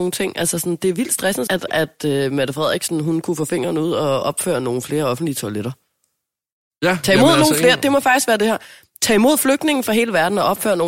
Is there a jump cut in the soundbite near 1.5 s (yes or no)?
yes